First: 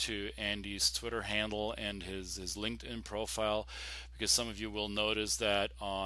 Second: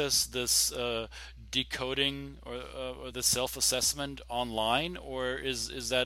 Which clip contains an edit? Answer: second; 1 cut; at 3.1 s

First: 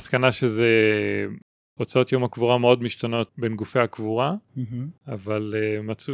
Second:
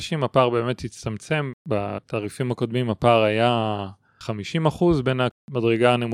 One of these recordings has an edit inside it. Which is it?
first; 1 cut; at 3.3 s

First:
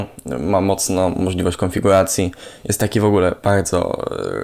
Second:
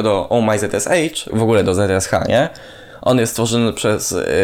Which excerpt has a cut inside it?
second; 1 cut; at 1.3 s

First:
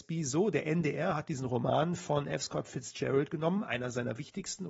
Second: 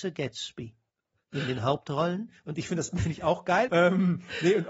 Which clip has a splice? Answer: second; 1 cut; at 3.7 s

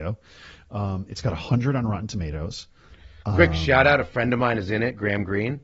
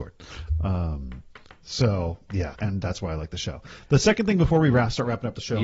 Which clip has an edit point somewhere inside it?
second; 1 cut; at 2.5 s

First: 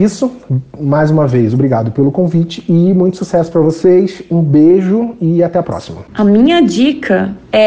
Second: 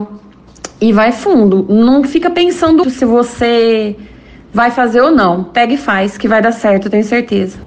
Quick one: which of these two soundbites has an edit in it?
second; 1 cut; at 2.8 s

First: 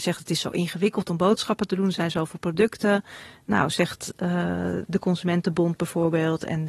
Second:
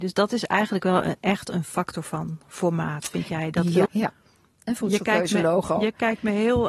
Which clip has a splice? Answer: second; 1 cut; at 3.9 s

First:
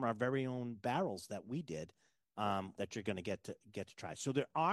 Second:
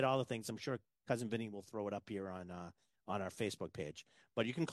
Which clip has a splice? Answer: first; 1 cut; at 2.8 s

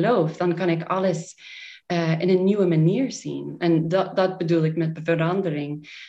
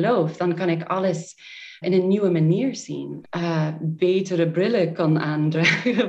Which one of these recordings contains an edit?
second; 2 cuts; at 1.8 s, 3.2 s

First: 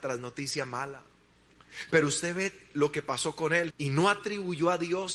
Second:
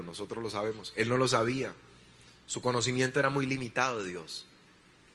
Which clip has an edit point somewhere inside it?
first; 1 cut; at 3.7 s

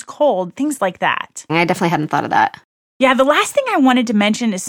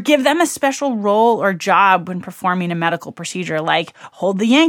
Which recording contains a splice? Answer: first; 1 cut; at 1.5 s

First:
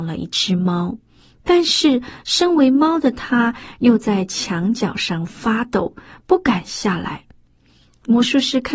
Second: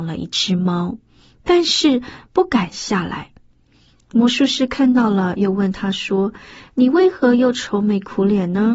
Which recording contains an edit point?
second; 1 cut; at 2.2 s

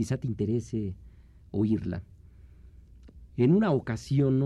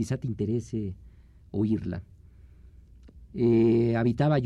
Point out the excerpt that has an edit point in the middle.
second; 1 cut; at 3.3 s

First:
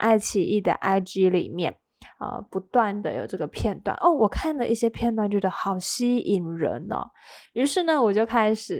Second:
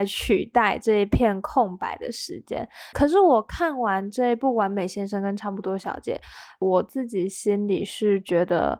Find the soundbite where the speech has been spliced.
second; 2 cuts; at 2.9 s, 6.6 s

